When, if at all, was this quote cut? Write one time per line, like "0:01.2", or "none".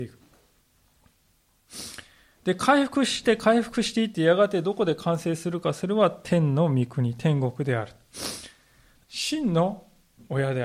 0:09.0